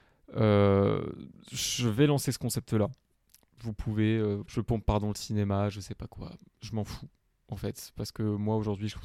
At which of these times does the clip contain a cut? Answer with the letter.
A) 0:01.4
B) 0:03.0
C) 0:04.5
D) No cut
C